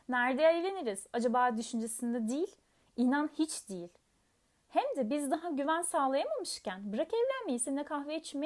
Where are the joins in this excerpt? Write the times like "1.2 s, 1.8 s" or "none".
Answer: none